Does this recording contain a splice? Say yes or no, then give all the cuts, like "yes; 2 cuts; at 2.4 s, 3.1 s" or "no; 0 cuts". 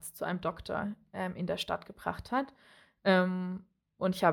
no; 0 cuts